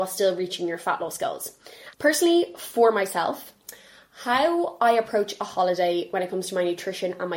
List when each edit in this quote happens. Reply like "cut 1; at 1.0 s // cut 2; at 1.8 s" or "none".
cut 1; at 1.9 s